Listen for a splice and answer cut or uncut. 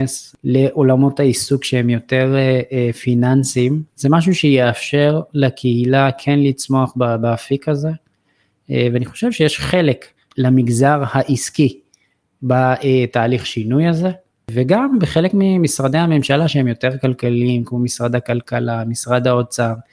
uncut